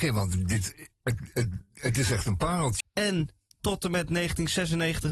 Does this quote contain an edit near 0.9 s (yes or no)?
no